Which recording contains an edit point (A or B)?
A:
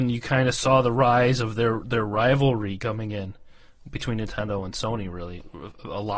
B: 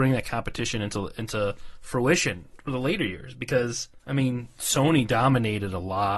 B